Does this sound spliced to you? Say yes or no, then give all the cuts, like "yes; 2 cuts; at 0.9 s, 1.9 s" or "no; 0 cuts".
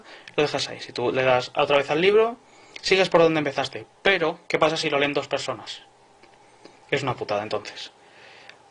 yes; 1 cut; at 4.5 s